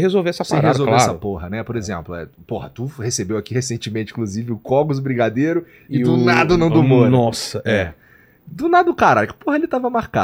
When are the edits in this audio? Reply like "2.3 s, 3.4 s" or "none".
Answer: none